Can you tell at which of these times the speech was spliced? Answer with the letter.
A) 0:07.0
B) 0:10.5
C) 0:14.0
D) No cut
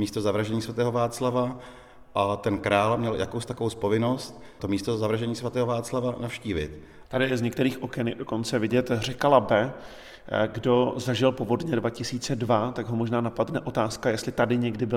A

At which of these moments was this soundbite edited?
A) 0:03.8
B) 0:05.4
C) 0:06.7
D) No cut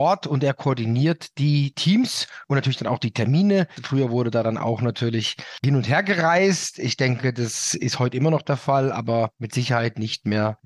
A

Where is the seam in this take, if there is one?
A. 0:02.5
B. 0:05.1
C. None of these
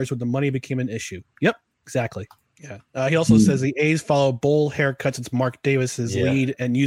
A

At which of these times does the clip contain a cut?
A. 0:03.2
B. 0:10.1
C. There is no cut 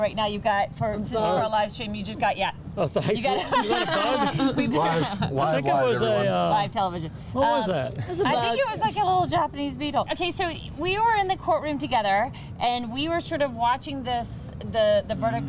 B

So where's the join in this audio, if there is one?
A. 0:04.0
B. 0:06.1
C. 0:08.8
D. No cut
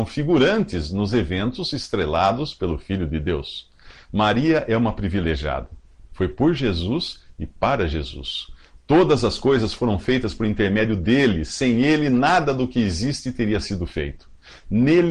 B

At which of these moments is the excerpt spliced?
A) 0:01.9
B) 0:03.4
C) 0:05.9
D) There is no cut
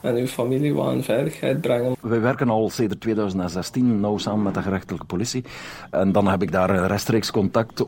A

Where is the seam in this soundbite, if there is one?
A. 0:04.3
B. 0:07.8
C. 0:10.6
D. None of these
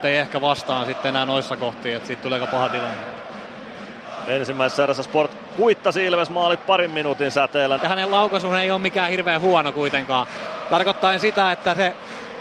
B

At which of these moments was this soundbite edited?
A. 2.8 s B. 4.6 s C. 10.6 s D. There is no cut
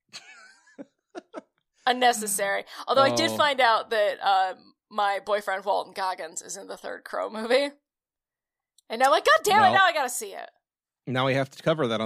D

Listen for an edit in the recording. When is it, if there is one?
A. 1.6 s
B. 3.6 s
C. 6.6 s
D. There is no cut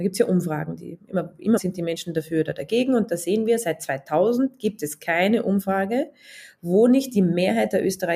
A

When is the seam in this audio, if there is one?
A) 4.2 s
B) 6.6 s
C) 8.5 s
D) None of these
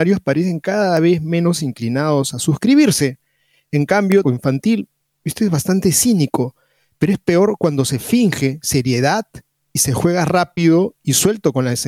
A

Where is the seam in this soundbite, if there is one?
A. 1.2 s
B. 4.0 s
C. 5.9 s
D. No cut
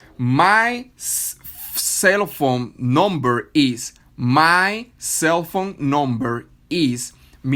D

